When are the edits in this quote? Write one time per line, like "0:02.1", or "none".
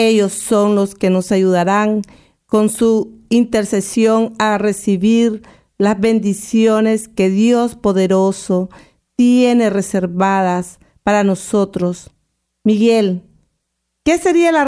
0:12.5